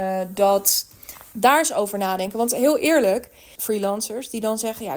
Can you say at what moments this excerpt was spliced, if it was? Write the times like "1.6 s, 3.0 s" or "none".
1.3 s, 3.6 s